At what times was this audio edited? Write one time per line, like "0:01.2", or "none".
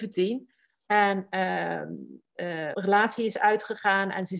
0:02.7